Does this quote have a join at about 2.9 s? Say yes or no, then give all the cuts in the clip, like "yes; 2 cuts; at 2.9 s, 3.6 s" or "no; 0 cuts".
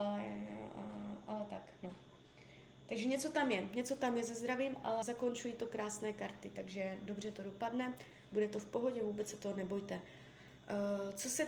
no; 1 cut; at 5.0 s